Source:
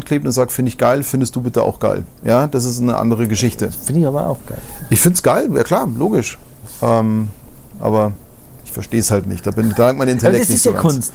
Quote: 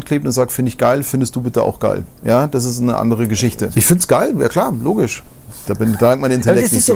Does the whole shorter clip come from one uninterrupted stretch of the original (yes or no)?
no